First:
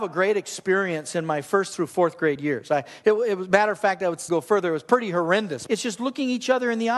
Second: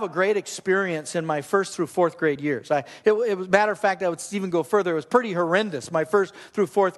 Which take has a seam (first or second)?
first